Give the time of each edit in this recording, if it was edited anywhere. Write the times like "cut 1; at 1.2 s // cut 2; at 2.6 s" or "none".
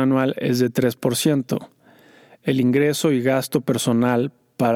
none